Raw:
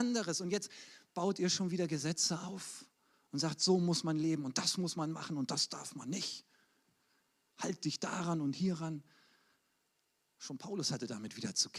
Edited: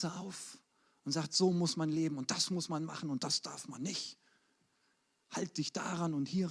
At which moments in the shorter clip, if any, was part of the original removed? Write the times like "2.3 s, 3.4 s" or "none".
none